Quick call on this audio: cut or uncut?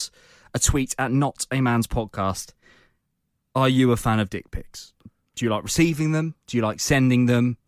uncut